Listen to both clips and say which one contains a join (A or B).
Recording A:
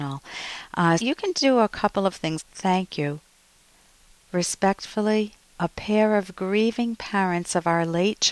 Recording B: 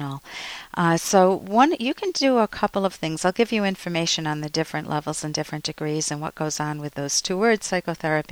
A